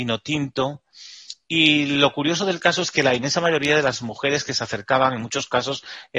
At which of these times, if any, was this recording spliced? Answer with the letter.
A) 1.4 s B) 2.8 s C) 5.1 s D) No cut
A